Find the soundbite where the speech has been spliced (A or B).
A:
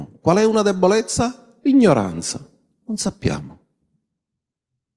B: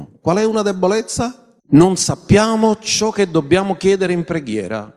B